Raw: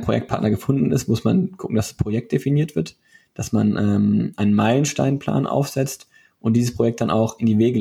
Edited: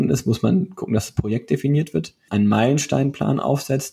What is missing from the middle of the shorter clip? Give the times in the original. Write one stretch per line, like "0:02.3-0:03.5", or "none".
0:03.1-0:04.3